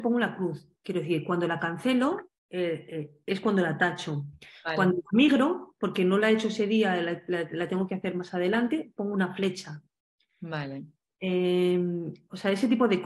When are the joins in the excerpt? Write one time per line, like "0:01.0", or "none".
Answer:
0:02.4

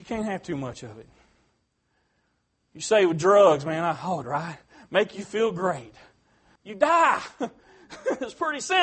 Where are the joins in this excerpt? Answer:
0:04.2
0:06.6

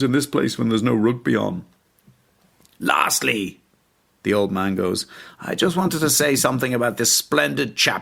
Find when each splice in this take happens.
none

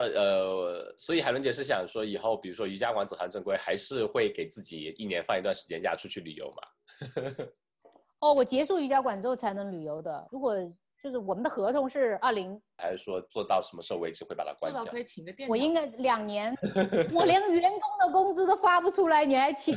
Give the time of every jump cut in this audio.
0:10.3
0:12.8
0:17.1

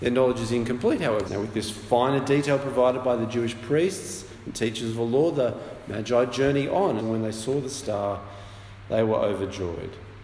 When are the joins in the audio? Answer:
0:01.3
0:07.0

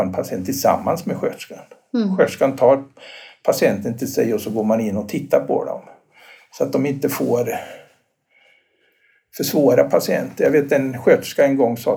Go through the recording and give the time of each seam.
none

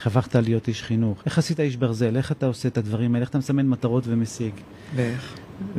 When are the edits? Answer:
0:01.2

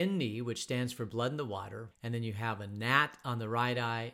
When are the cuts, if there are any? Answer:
0:01.9

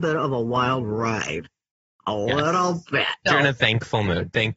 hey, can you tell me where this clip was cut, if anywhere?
0:03.3

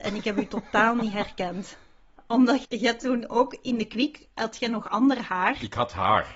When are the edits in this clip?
0:02.6

